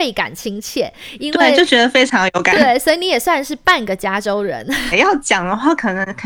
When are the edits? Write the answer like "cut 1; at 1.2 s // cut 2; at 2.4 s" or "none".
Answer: cut 1; at 2.5 s // cut 2; at 4.9 s